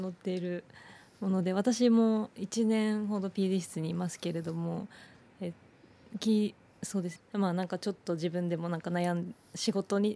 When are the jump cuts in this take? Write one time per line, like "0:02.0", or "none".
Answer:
0:07.2